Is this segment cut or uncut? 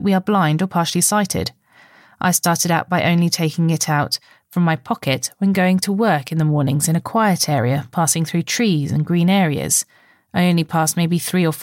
uncut